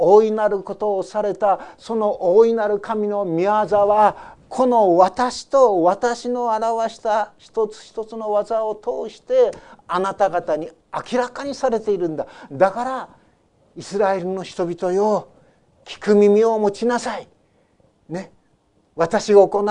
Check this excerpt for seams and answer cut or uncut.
uncut